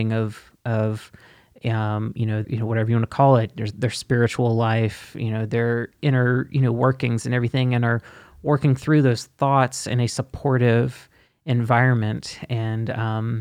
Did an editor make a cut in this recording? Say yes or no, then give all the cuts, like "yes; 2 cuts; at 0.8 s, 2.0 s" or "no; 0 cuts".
yes; 1 cut; at 2.4 s